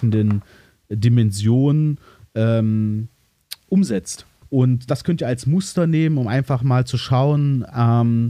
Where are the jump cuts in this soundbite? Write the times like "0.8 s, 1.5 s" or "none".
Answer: 4.4 s